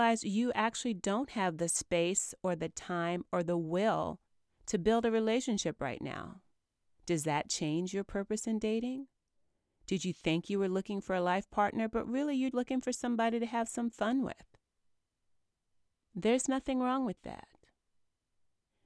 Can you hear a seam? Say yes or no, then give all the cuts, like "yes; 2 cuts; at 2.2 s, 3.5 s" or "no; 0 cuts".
yes; 1 cut; at 12.5 s